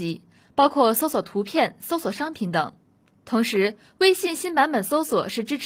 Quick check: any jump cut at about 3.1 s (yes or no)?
yes